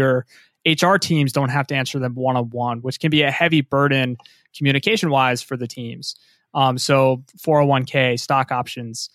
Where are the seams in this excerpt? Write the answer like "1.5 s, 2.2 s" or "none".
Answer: none